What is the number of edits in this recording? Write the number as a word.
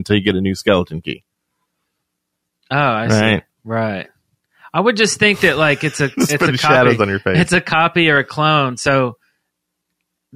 one